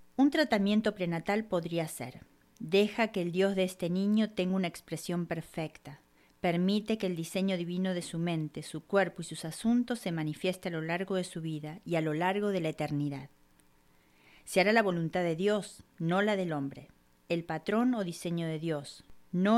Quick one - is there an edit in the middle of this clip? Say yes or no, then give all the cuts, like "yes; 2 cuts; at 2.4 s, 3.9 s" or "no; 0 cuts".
no; 0 cuts